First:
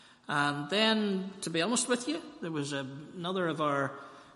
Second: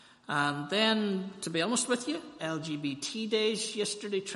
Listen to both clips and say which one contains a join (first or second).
second